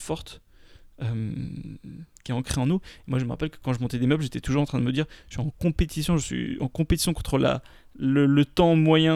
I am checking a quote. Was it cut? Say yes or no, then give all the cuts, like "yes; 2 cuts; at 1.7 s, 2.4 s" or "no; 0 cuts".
no; 0 cuts